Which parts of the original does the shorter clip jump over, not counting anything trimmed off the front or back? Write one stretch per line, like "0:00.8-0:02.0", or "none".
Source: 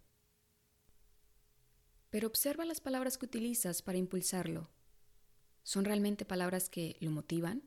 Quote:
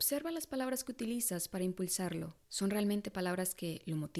0:04.8-0:05.6